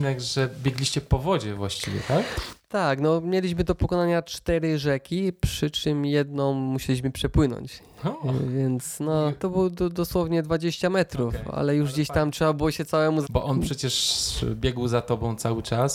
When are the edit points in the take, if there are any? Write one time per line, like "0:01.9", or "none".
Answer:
0:09.4
0:13.2

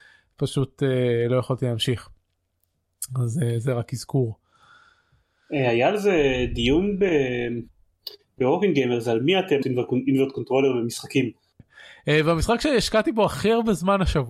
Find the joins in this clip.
0:09.6
0:11.6

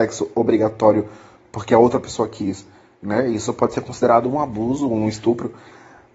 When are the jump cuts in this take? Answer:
none

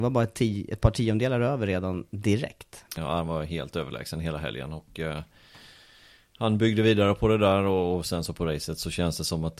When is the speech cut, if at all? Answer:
0:03.0

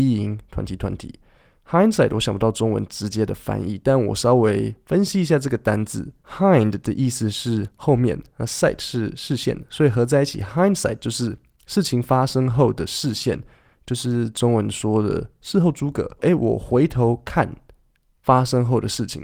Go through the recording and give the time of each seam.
0:16.2

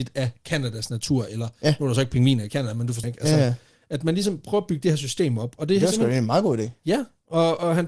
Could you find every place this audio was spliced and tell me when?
0:03.0

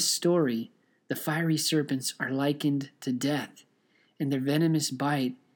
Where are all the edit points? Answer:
none

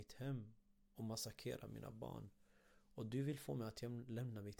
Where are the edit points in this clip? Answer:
none

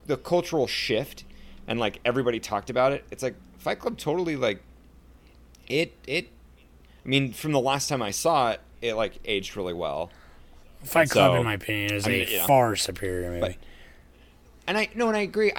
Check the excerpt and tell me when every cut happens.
none

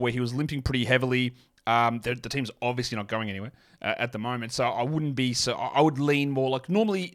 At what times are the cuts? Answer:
none

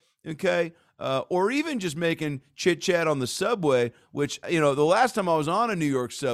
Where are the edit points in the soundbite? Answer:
0:04.4

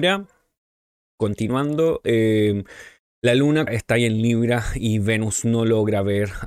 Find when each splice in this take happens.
0:03.7

